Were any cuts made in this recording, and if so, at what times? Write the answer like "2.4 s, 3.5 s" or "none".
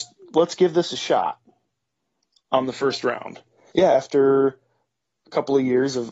3.7 s